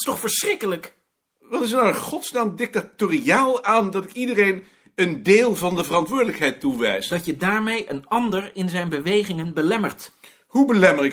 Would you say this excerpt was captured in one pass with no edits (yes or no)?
yes